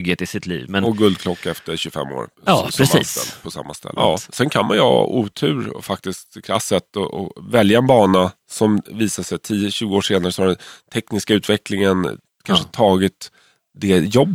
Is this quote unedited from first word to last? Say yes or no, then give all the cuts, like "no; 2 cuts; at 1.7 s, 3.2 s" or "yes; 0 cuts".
no; 1 cut; at 4.0 s